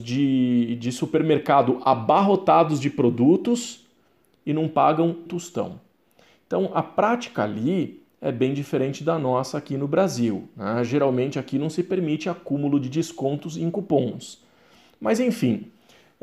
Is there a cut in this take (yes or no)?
yes